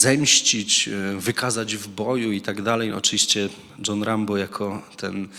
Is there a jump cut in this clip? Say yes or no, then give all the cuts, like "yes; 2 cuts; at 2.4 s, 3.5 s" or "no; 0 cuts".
no; 0 cuts